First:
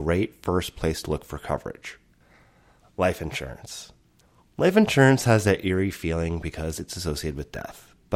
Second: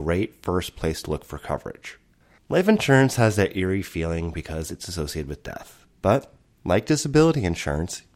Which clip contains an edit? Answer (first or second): second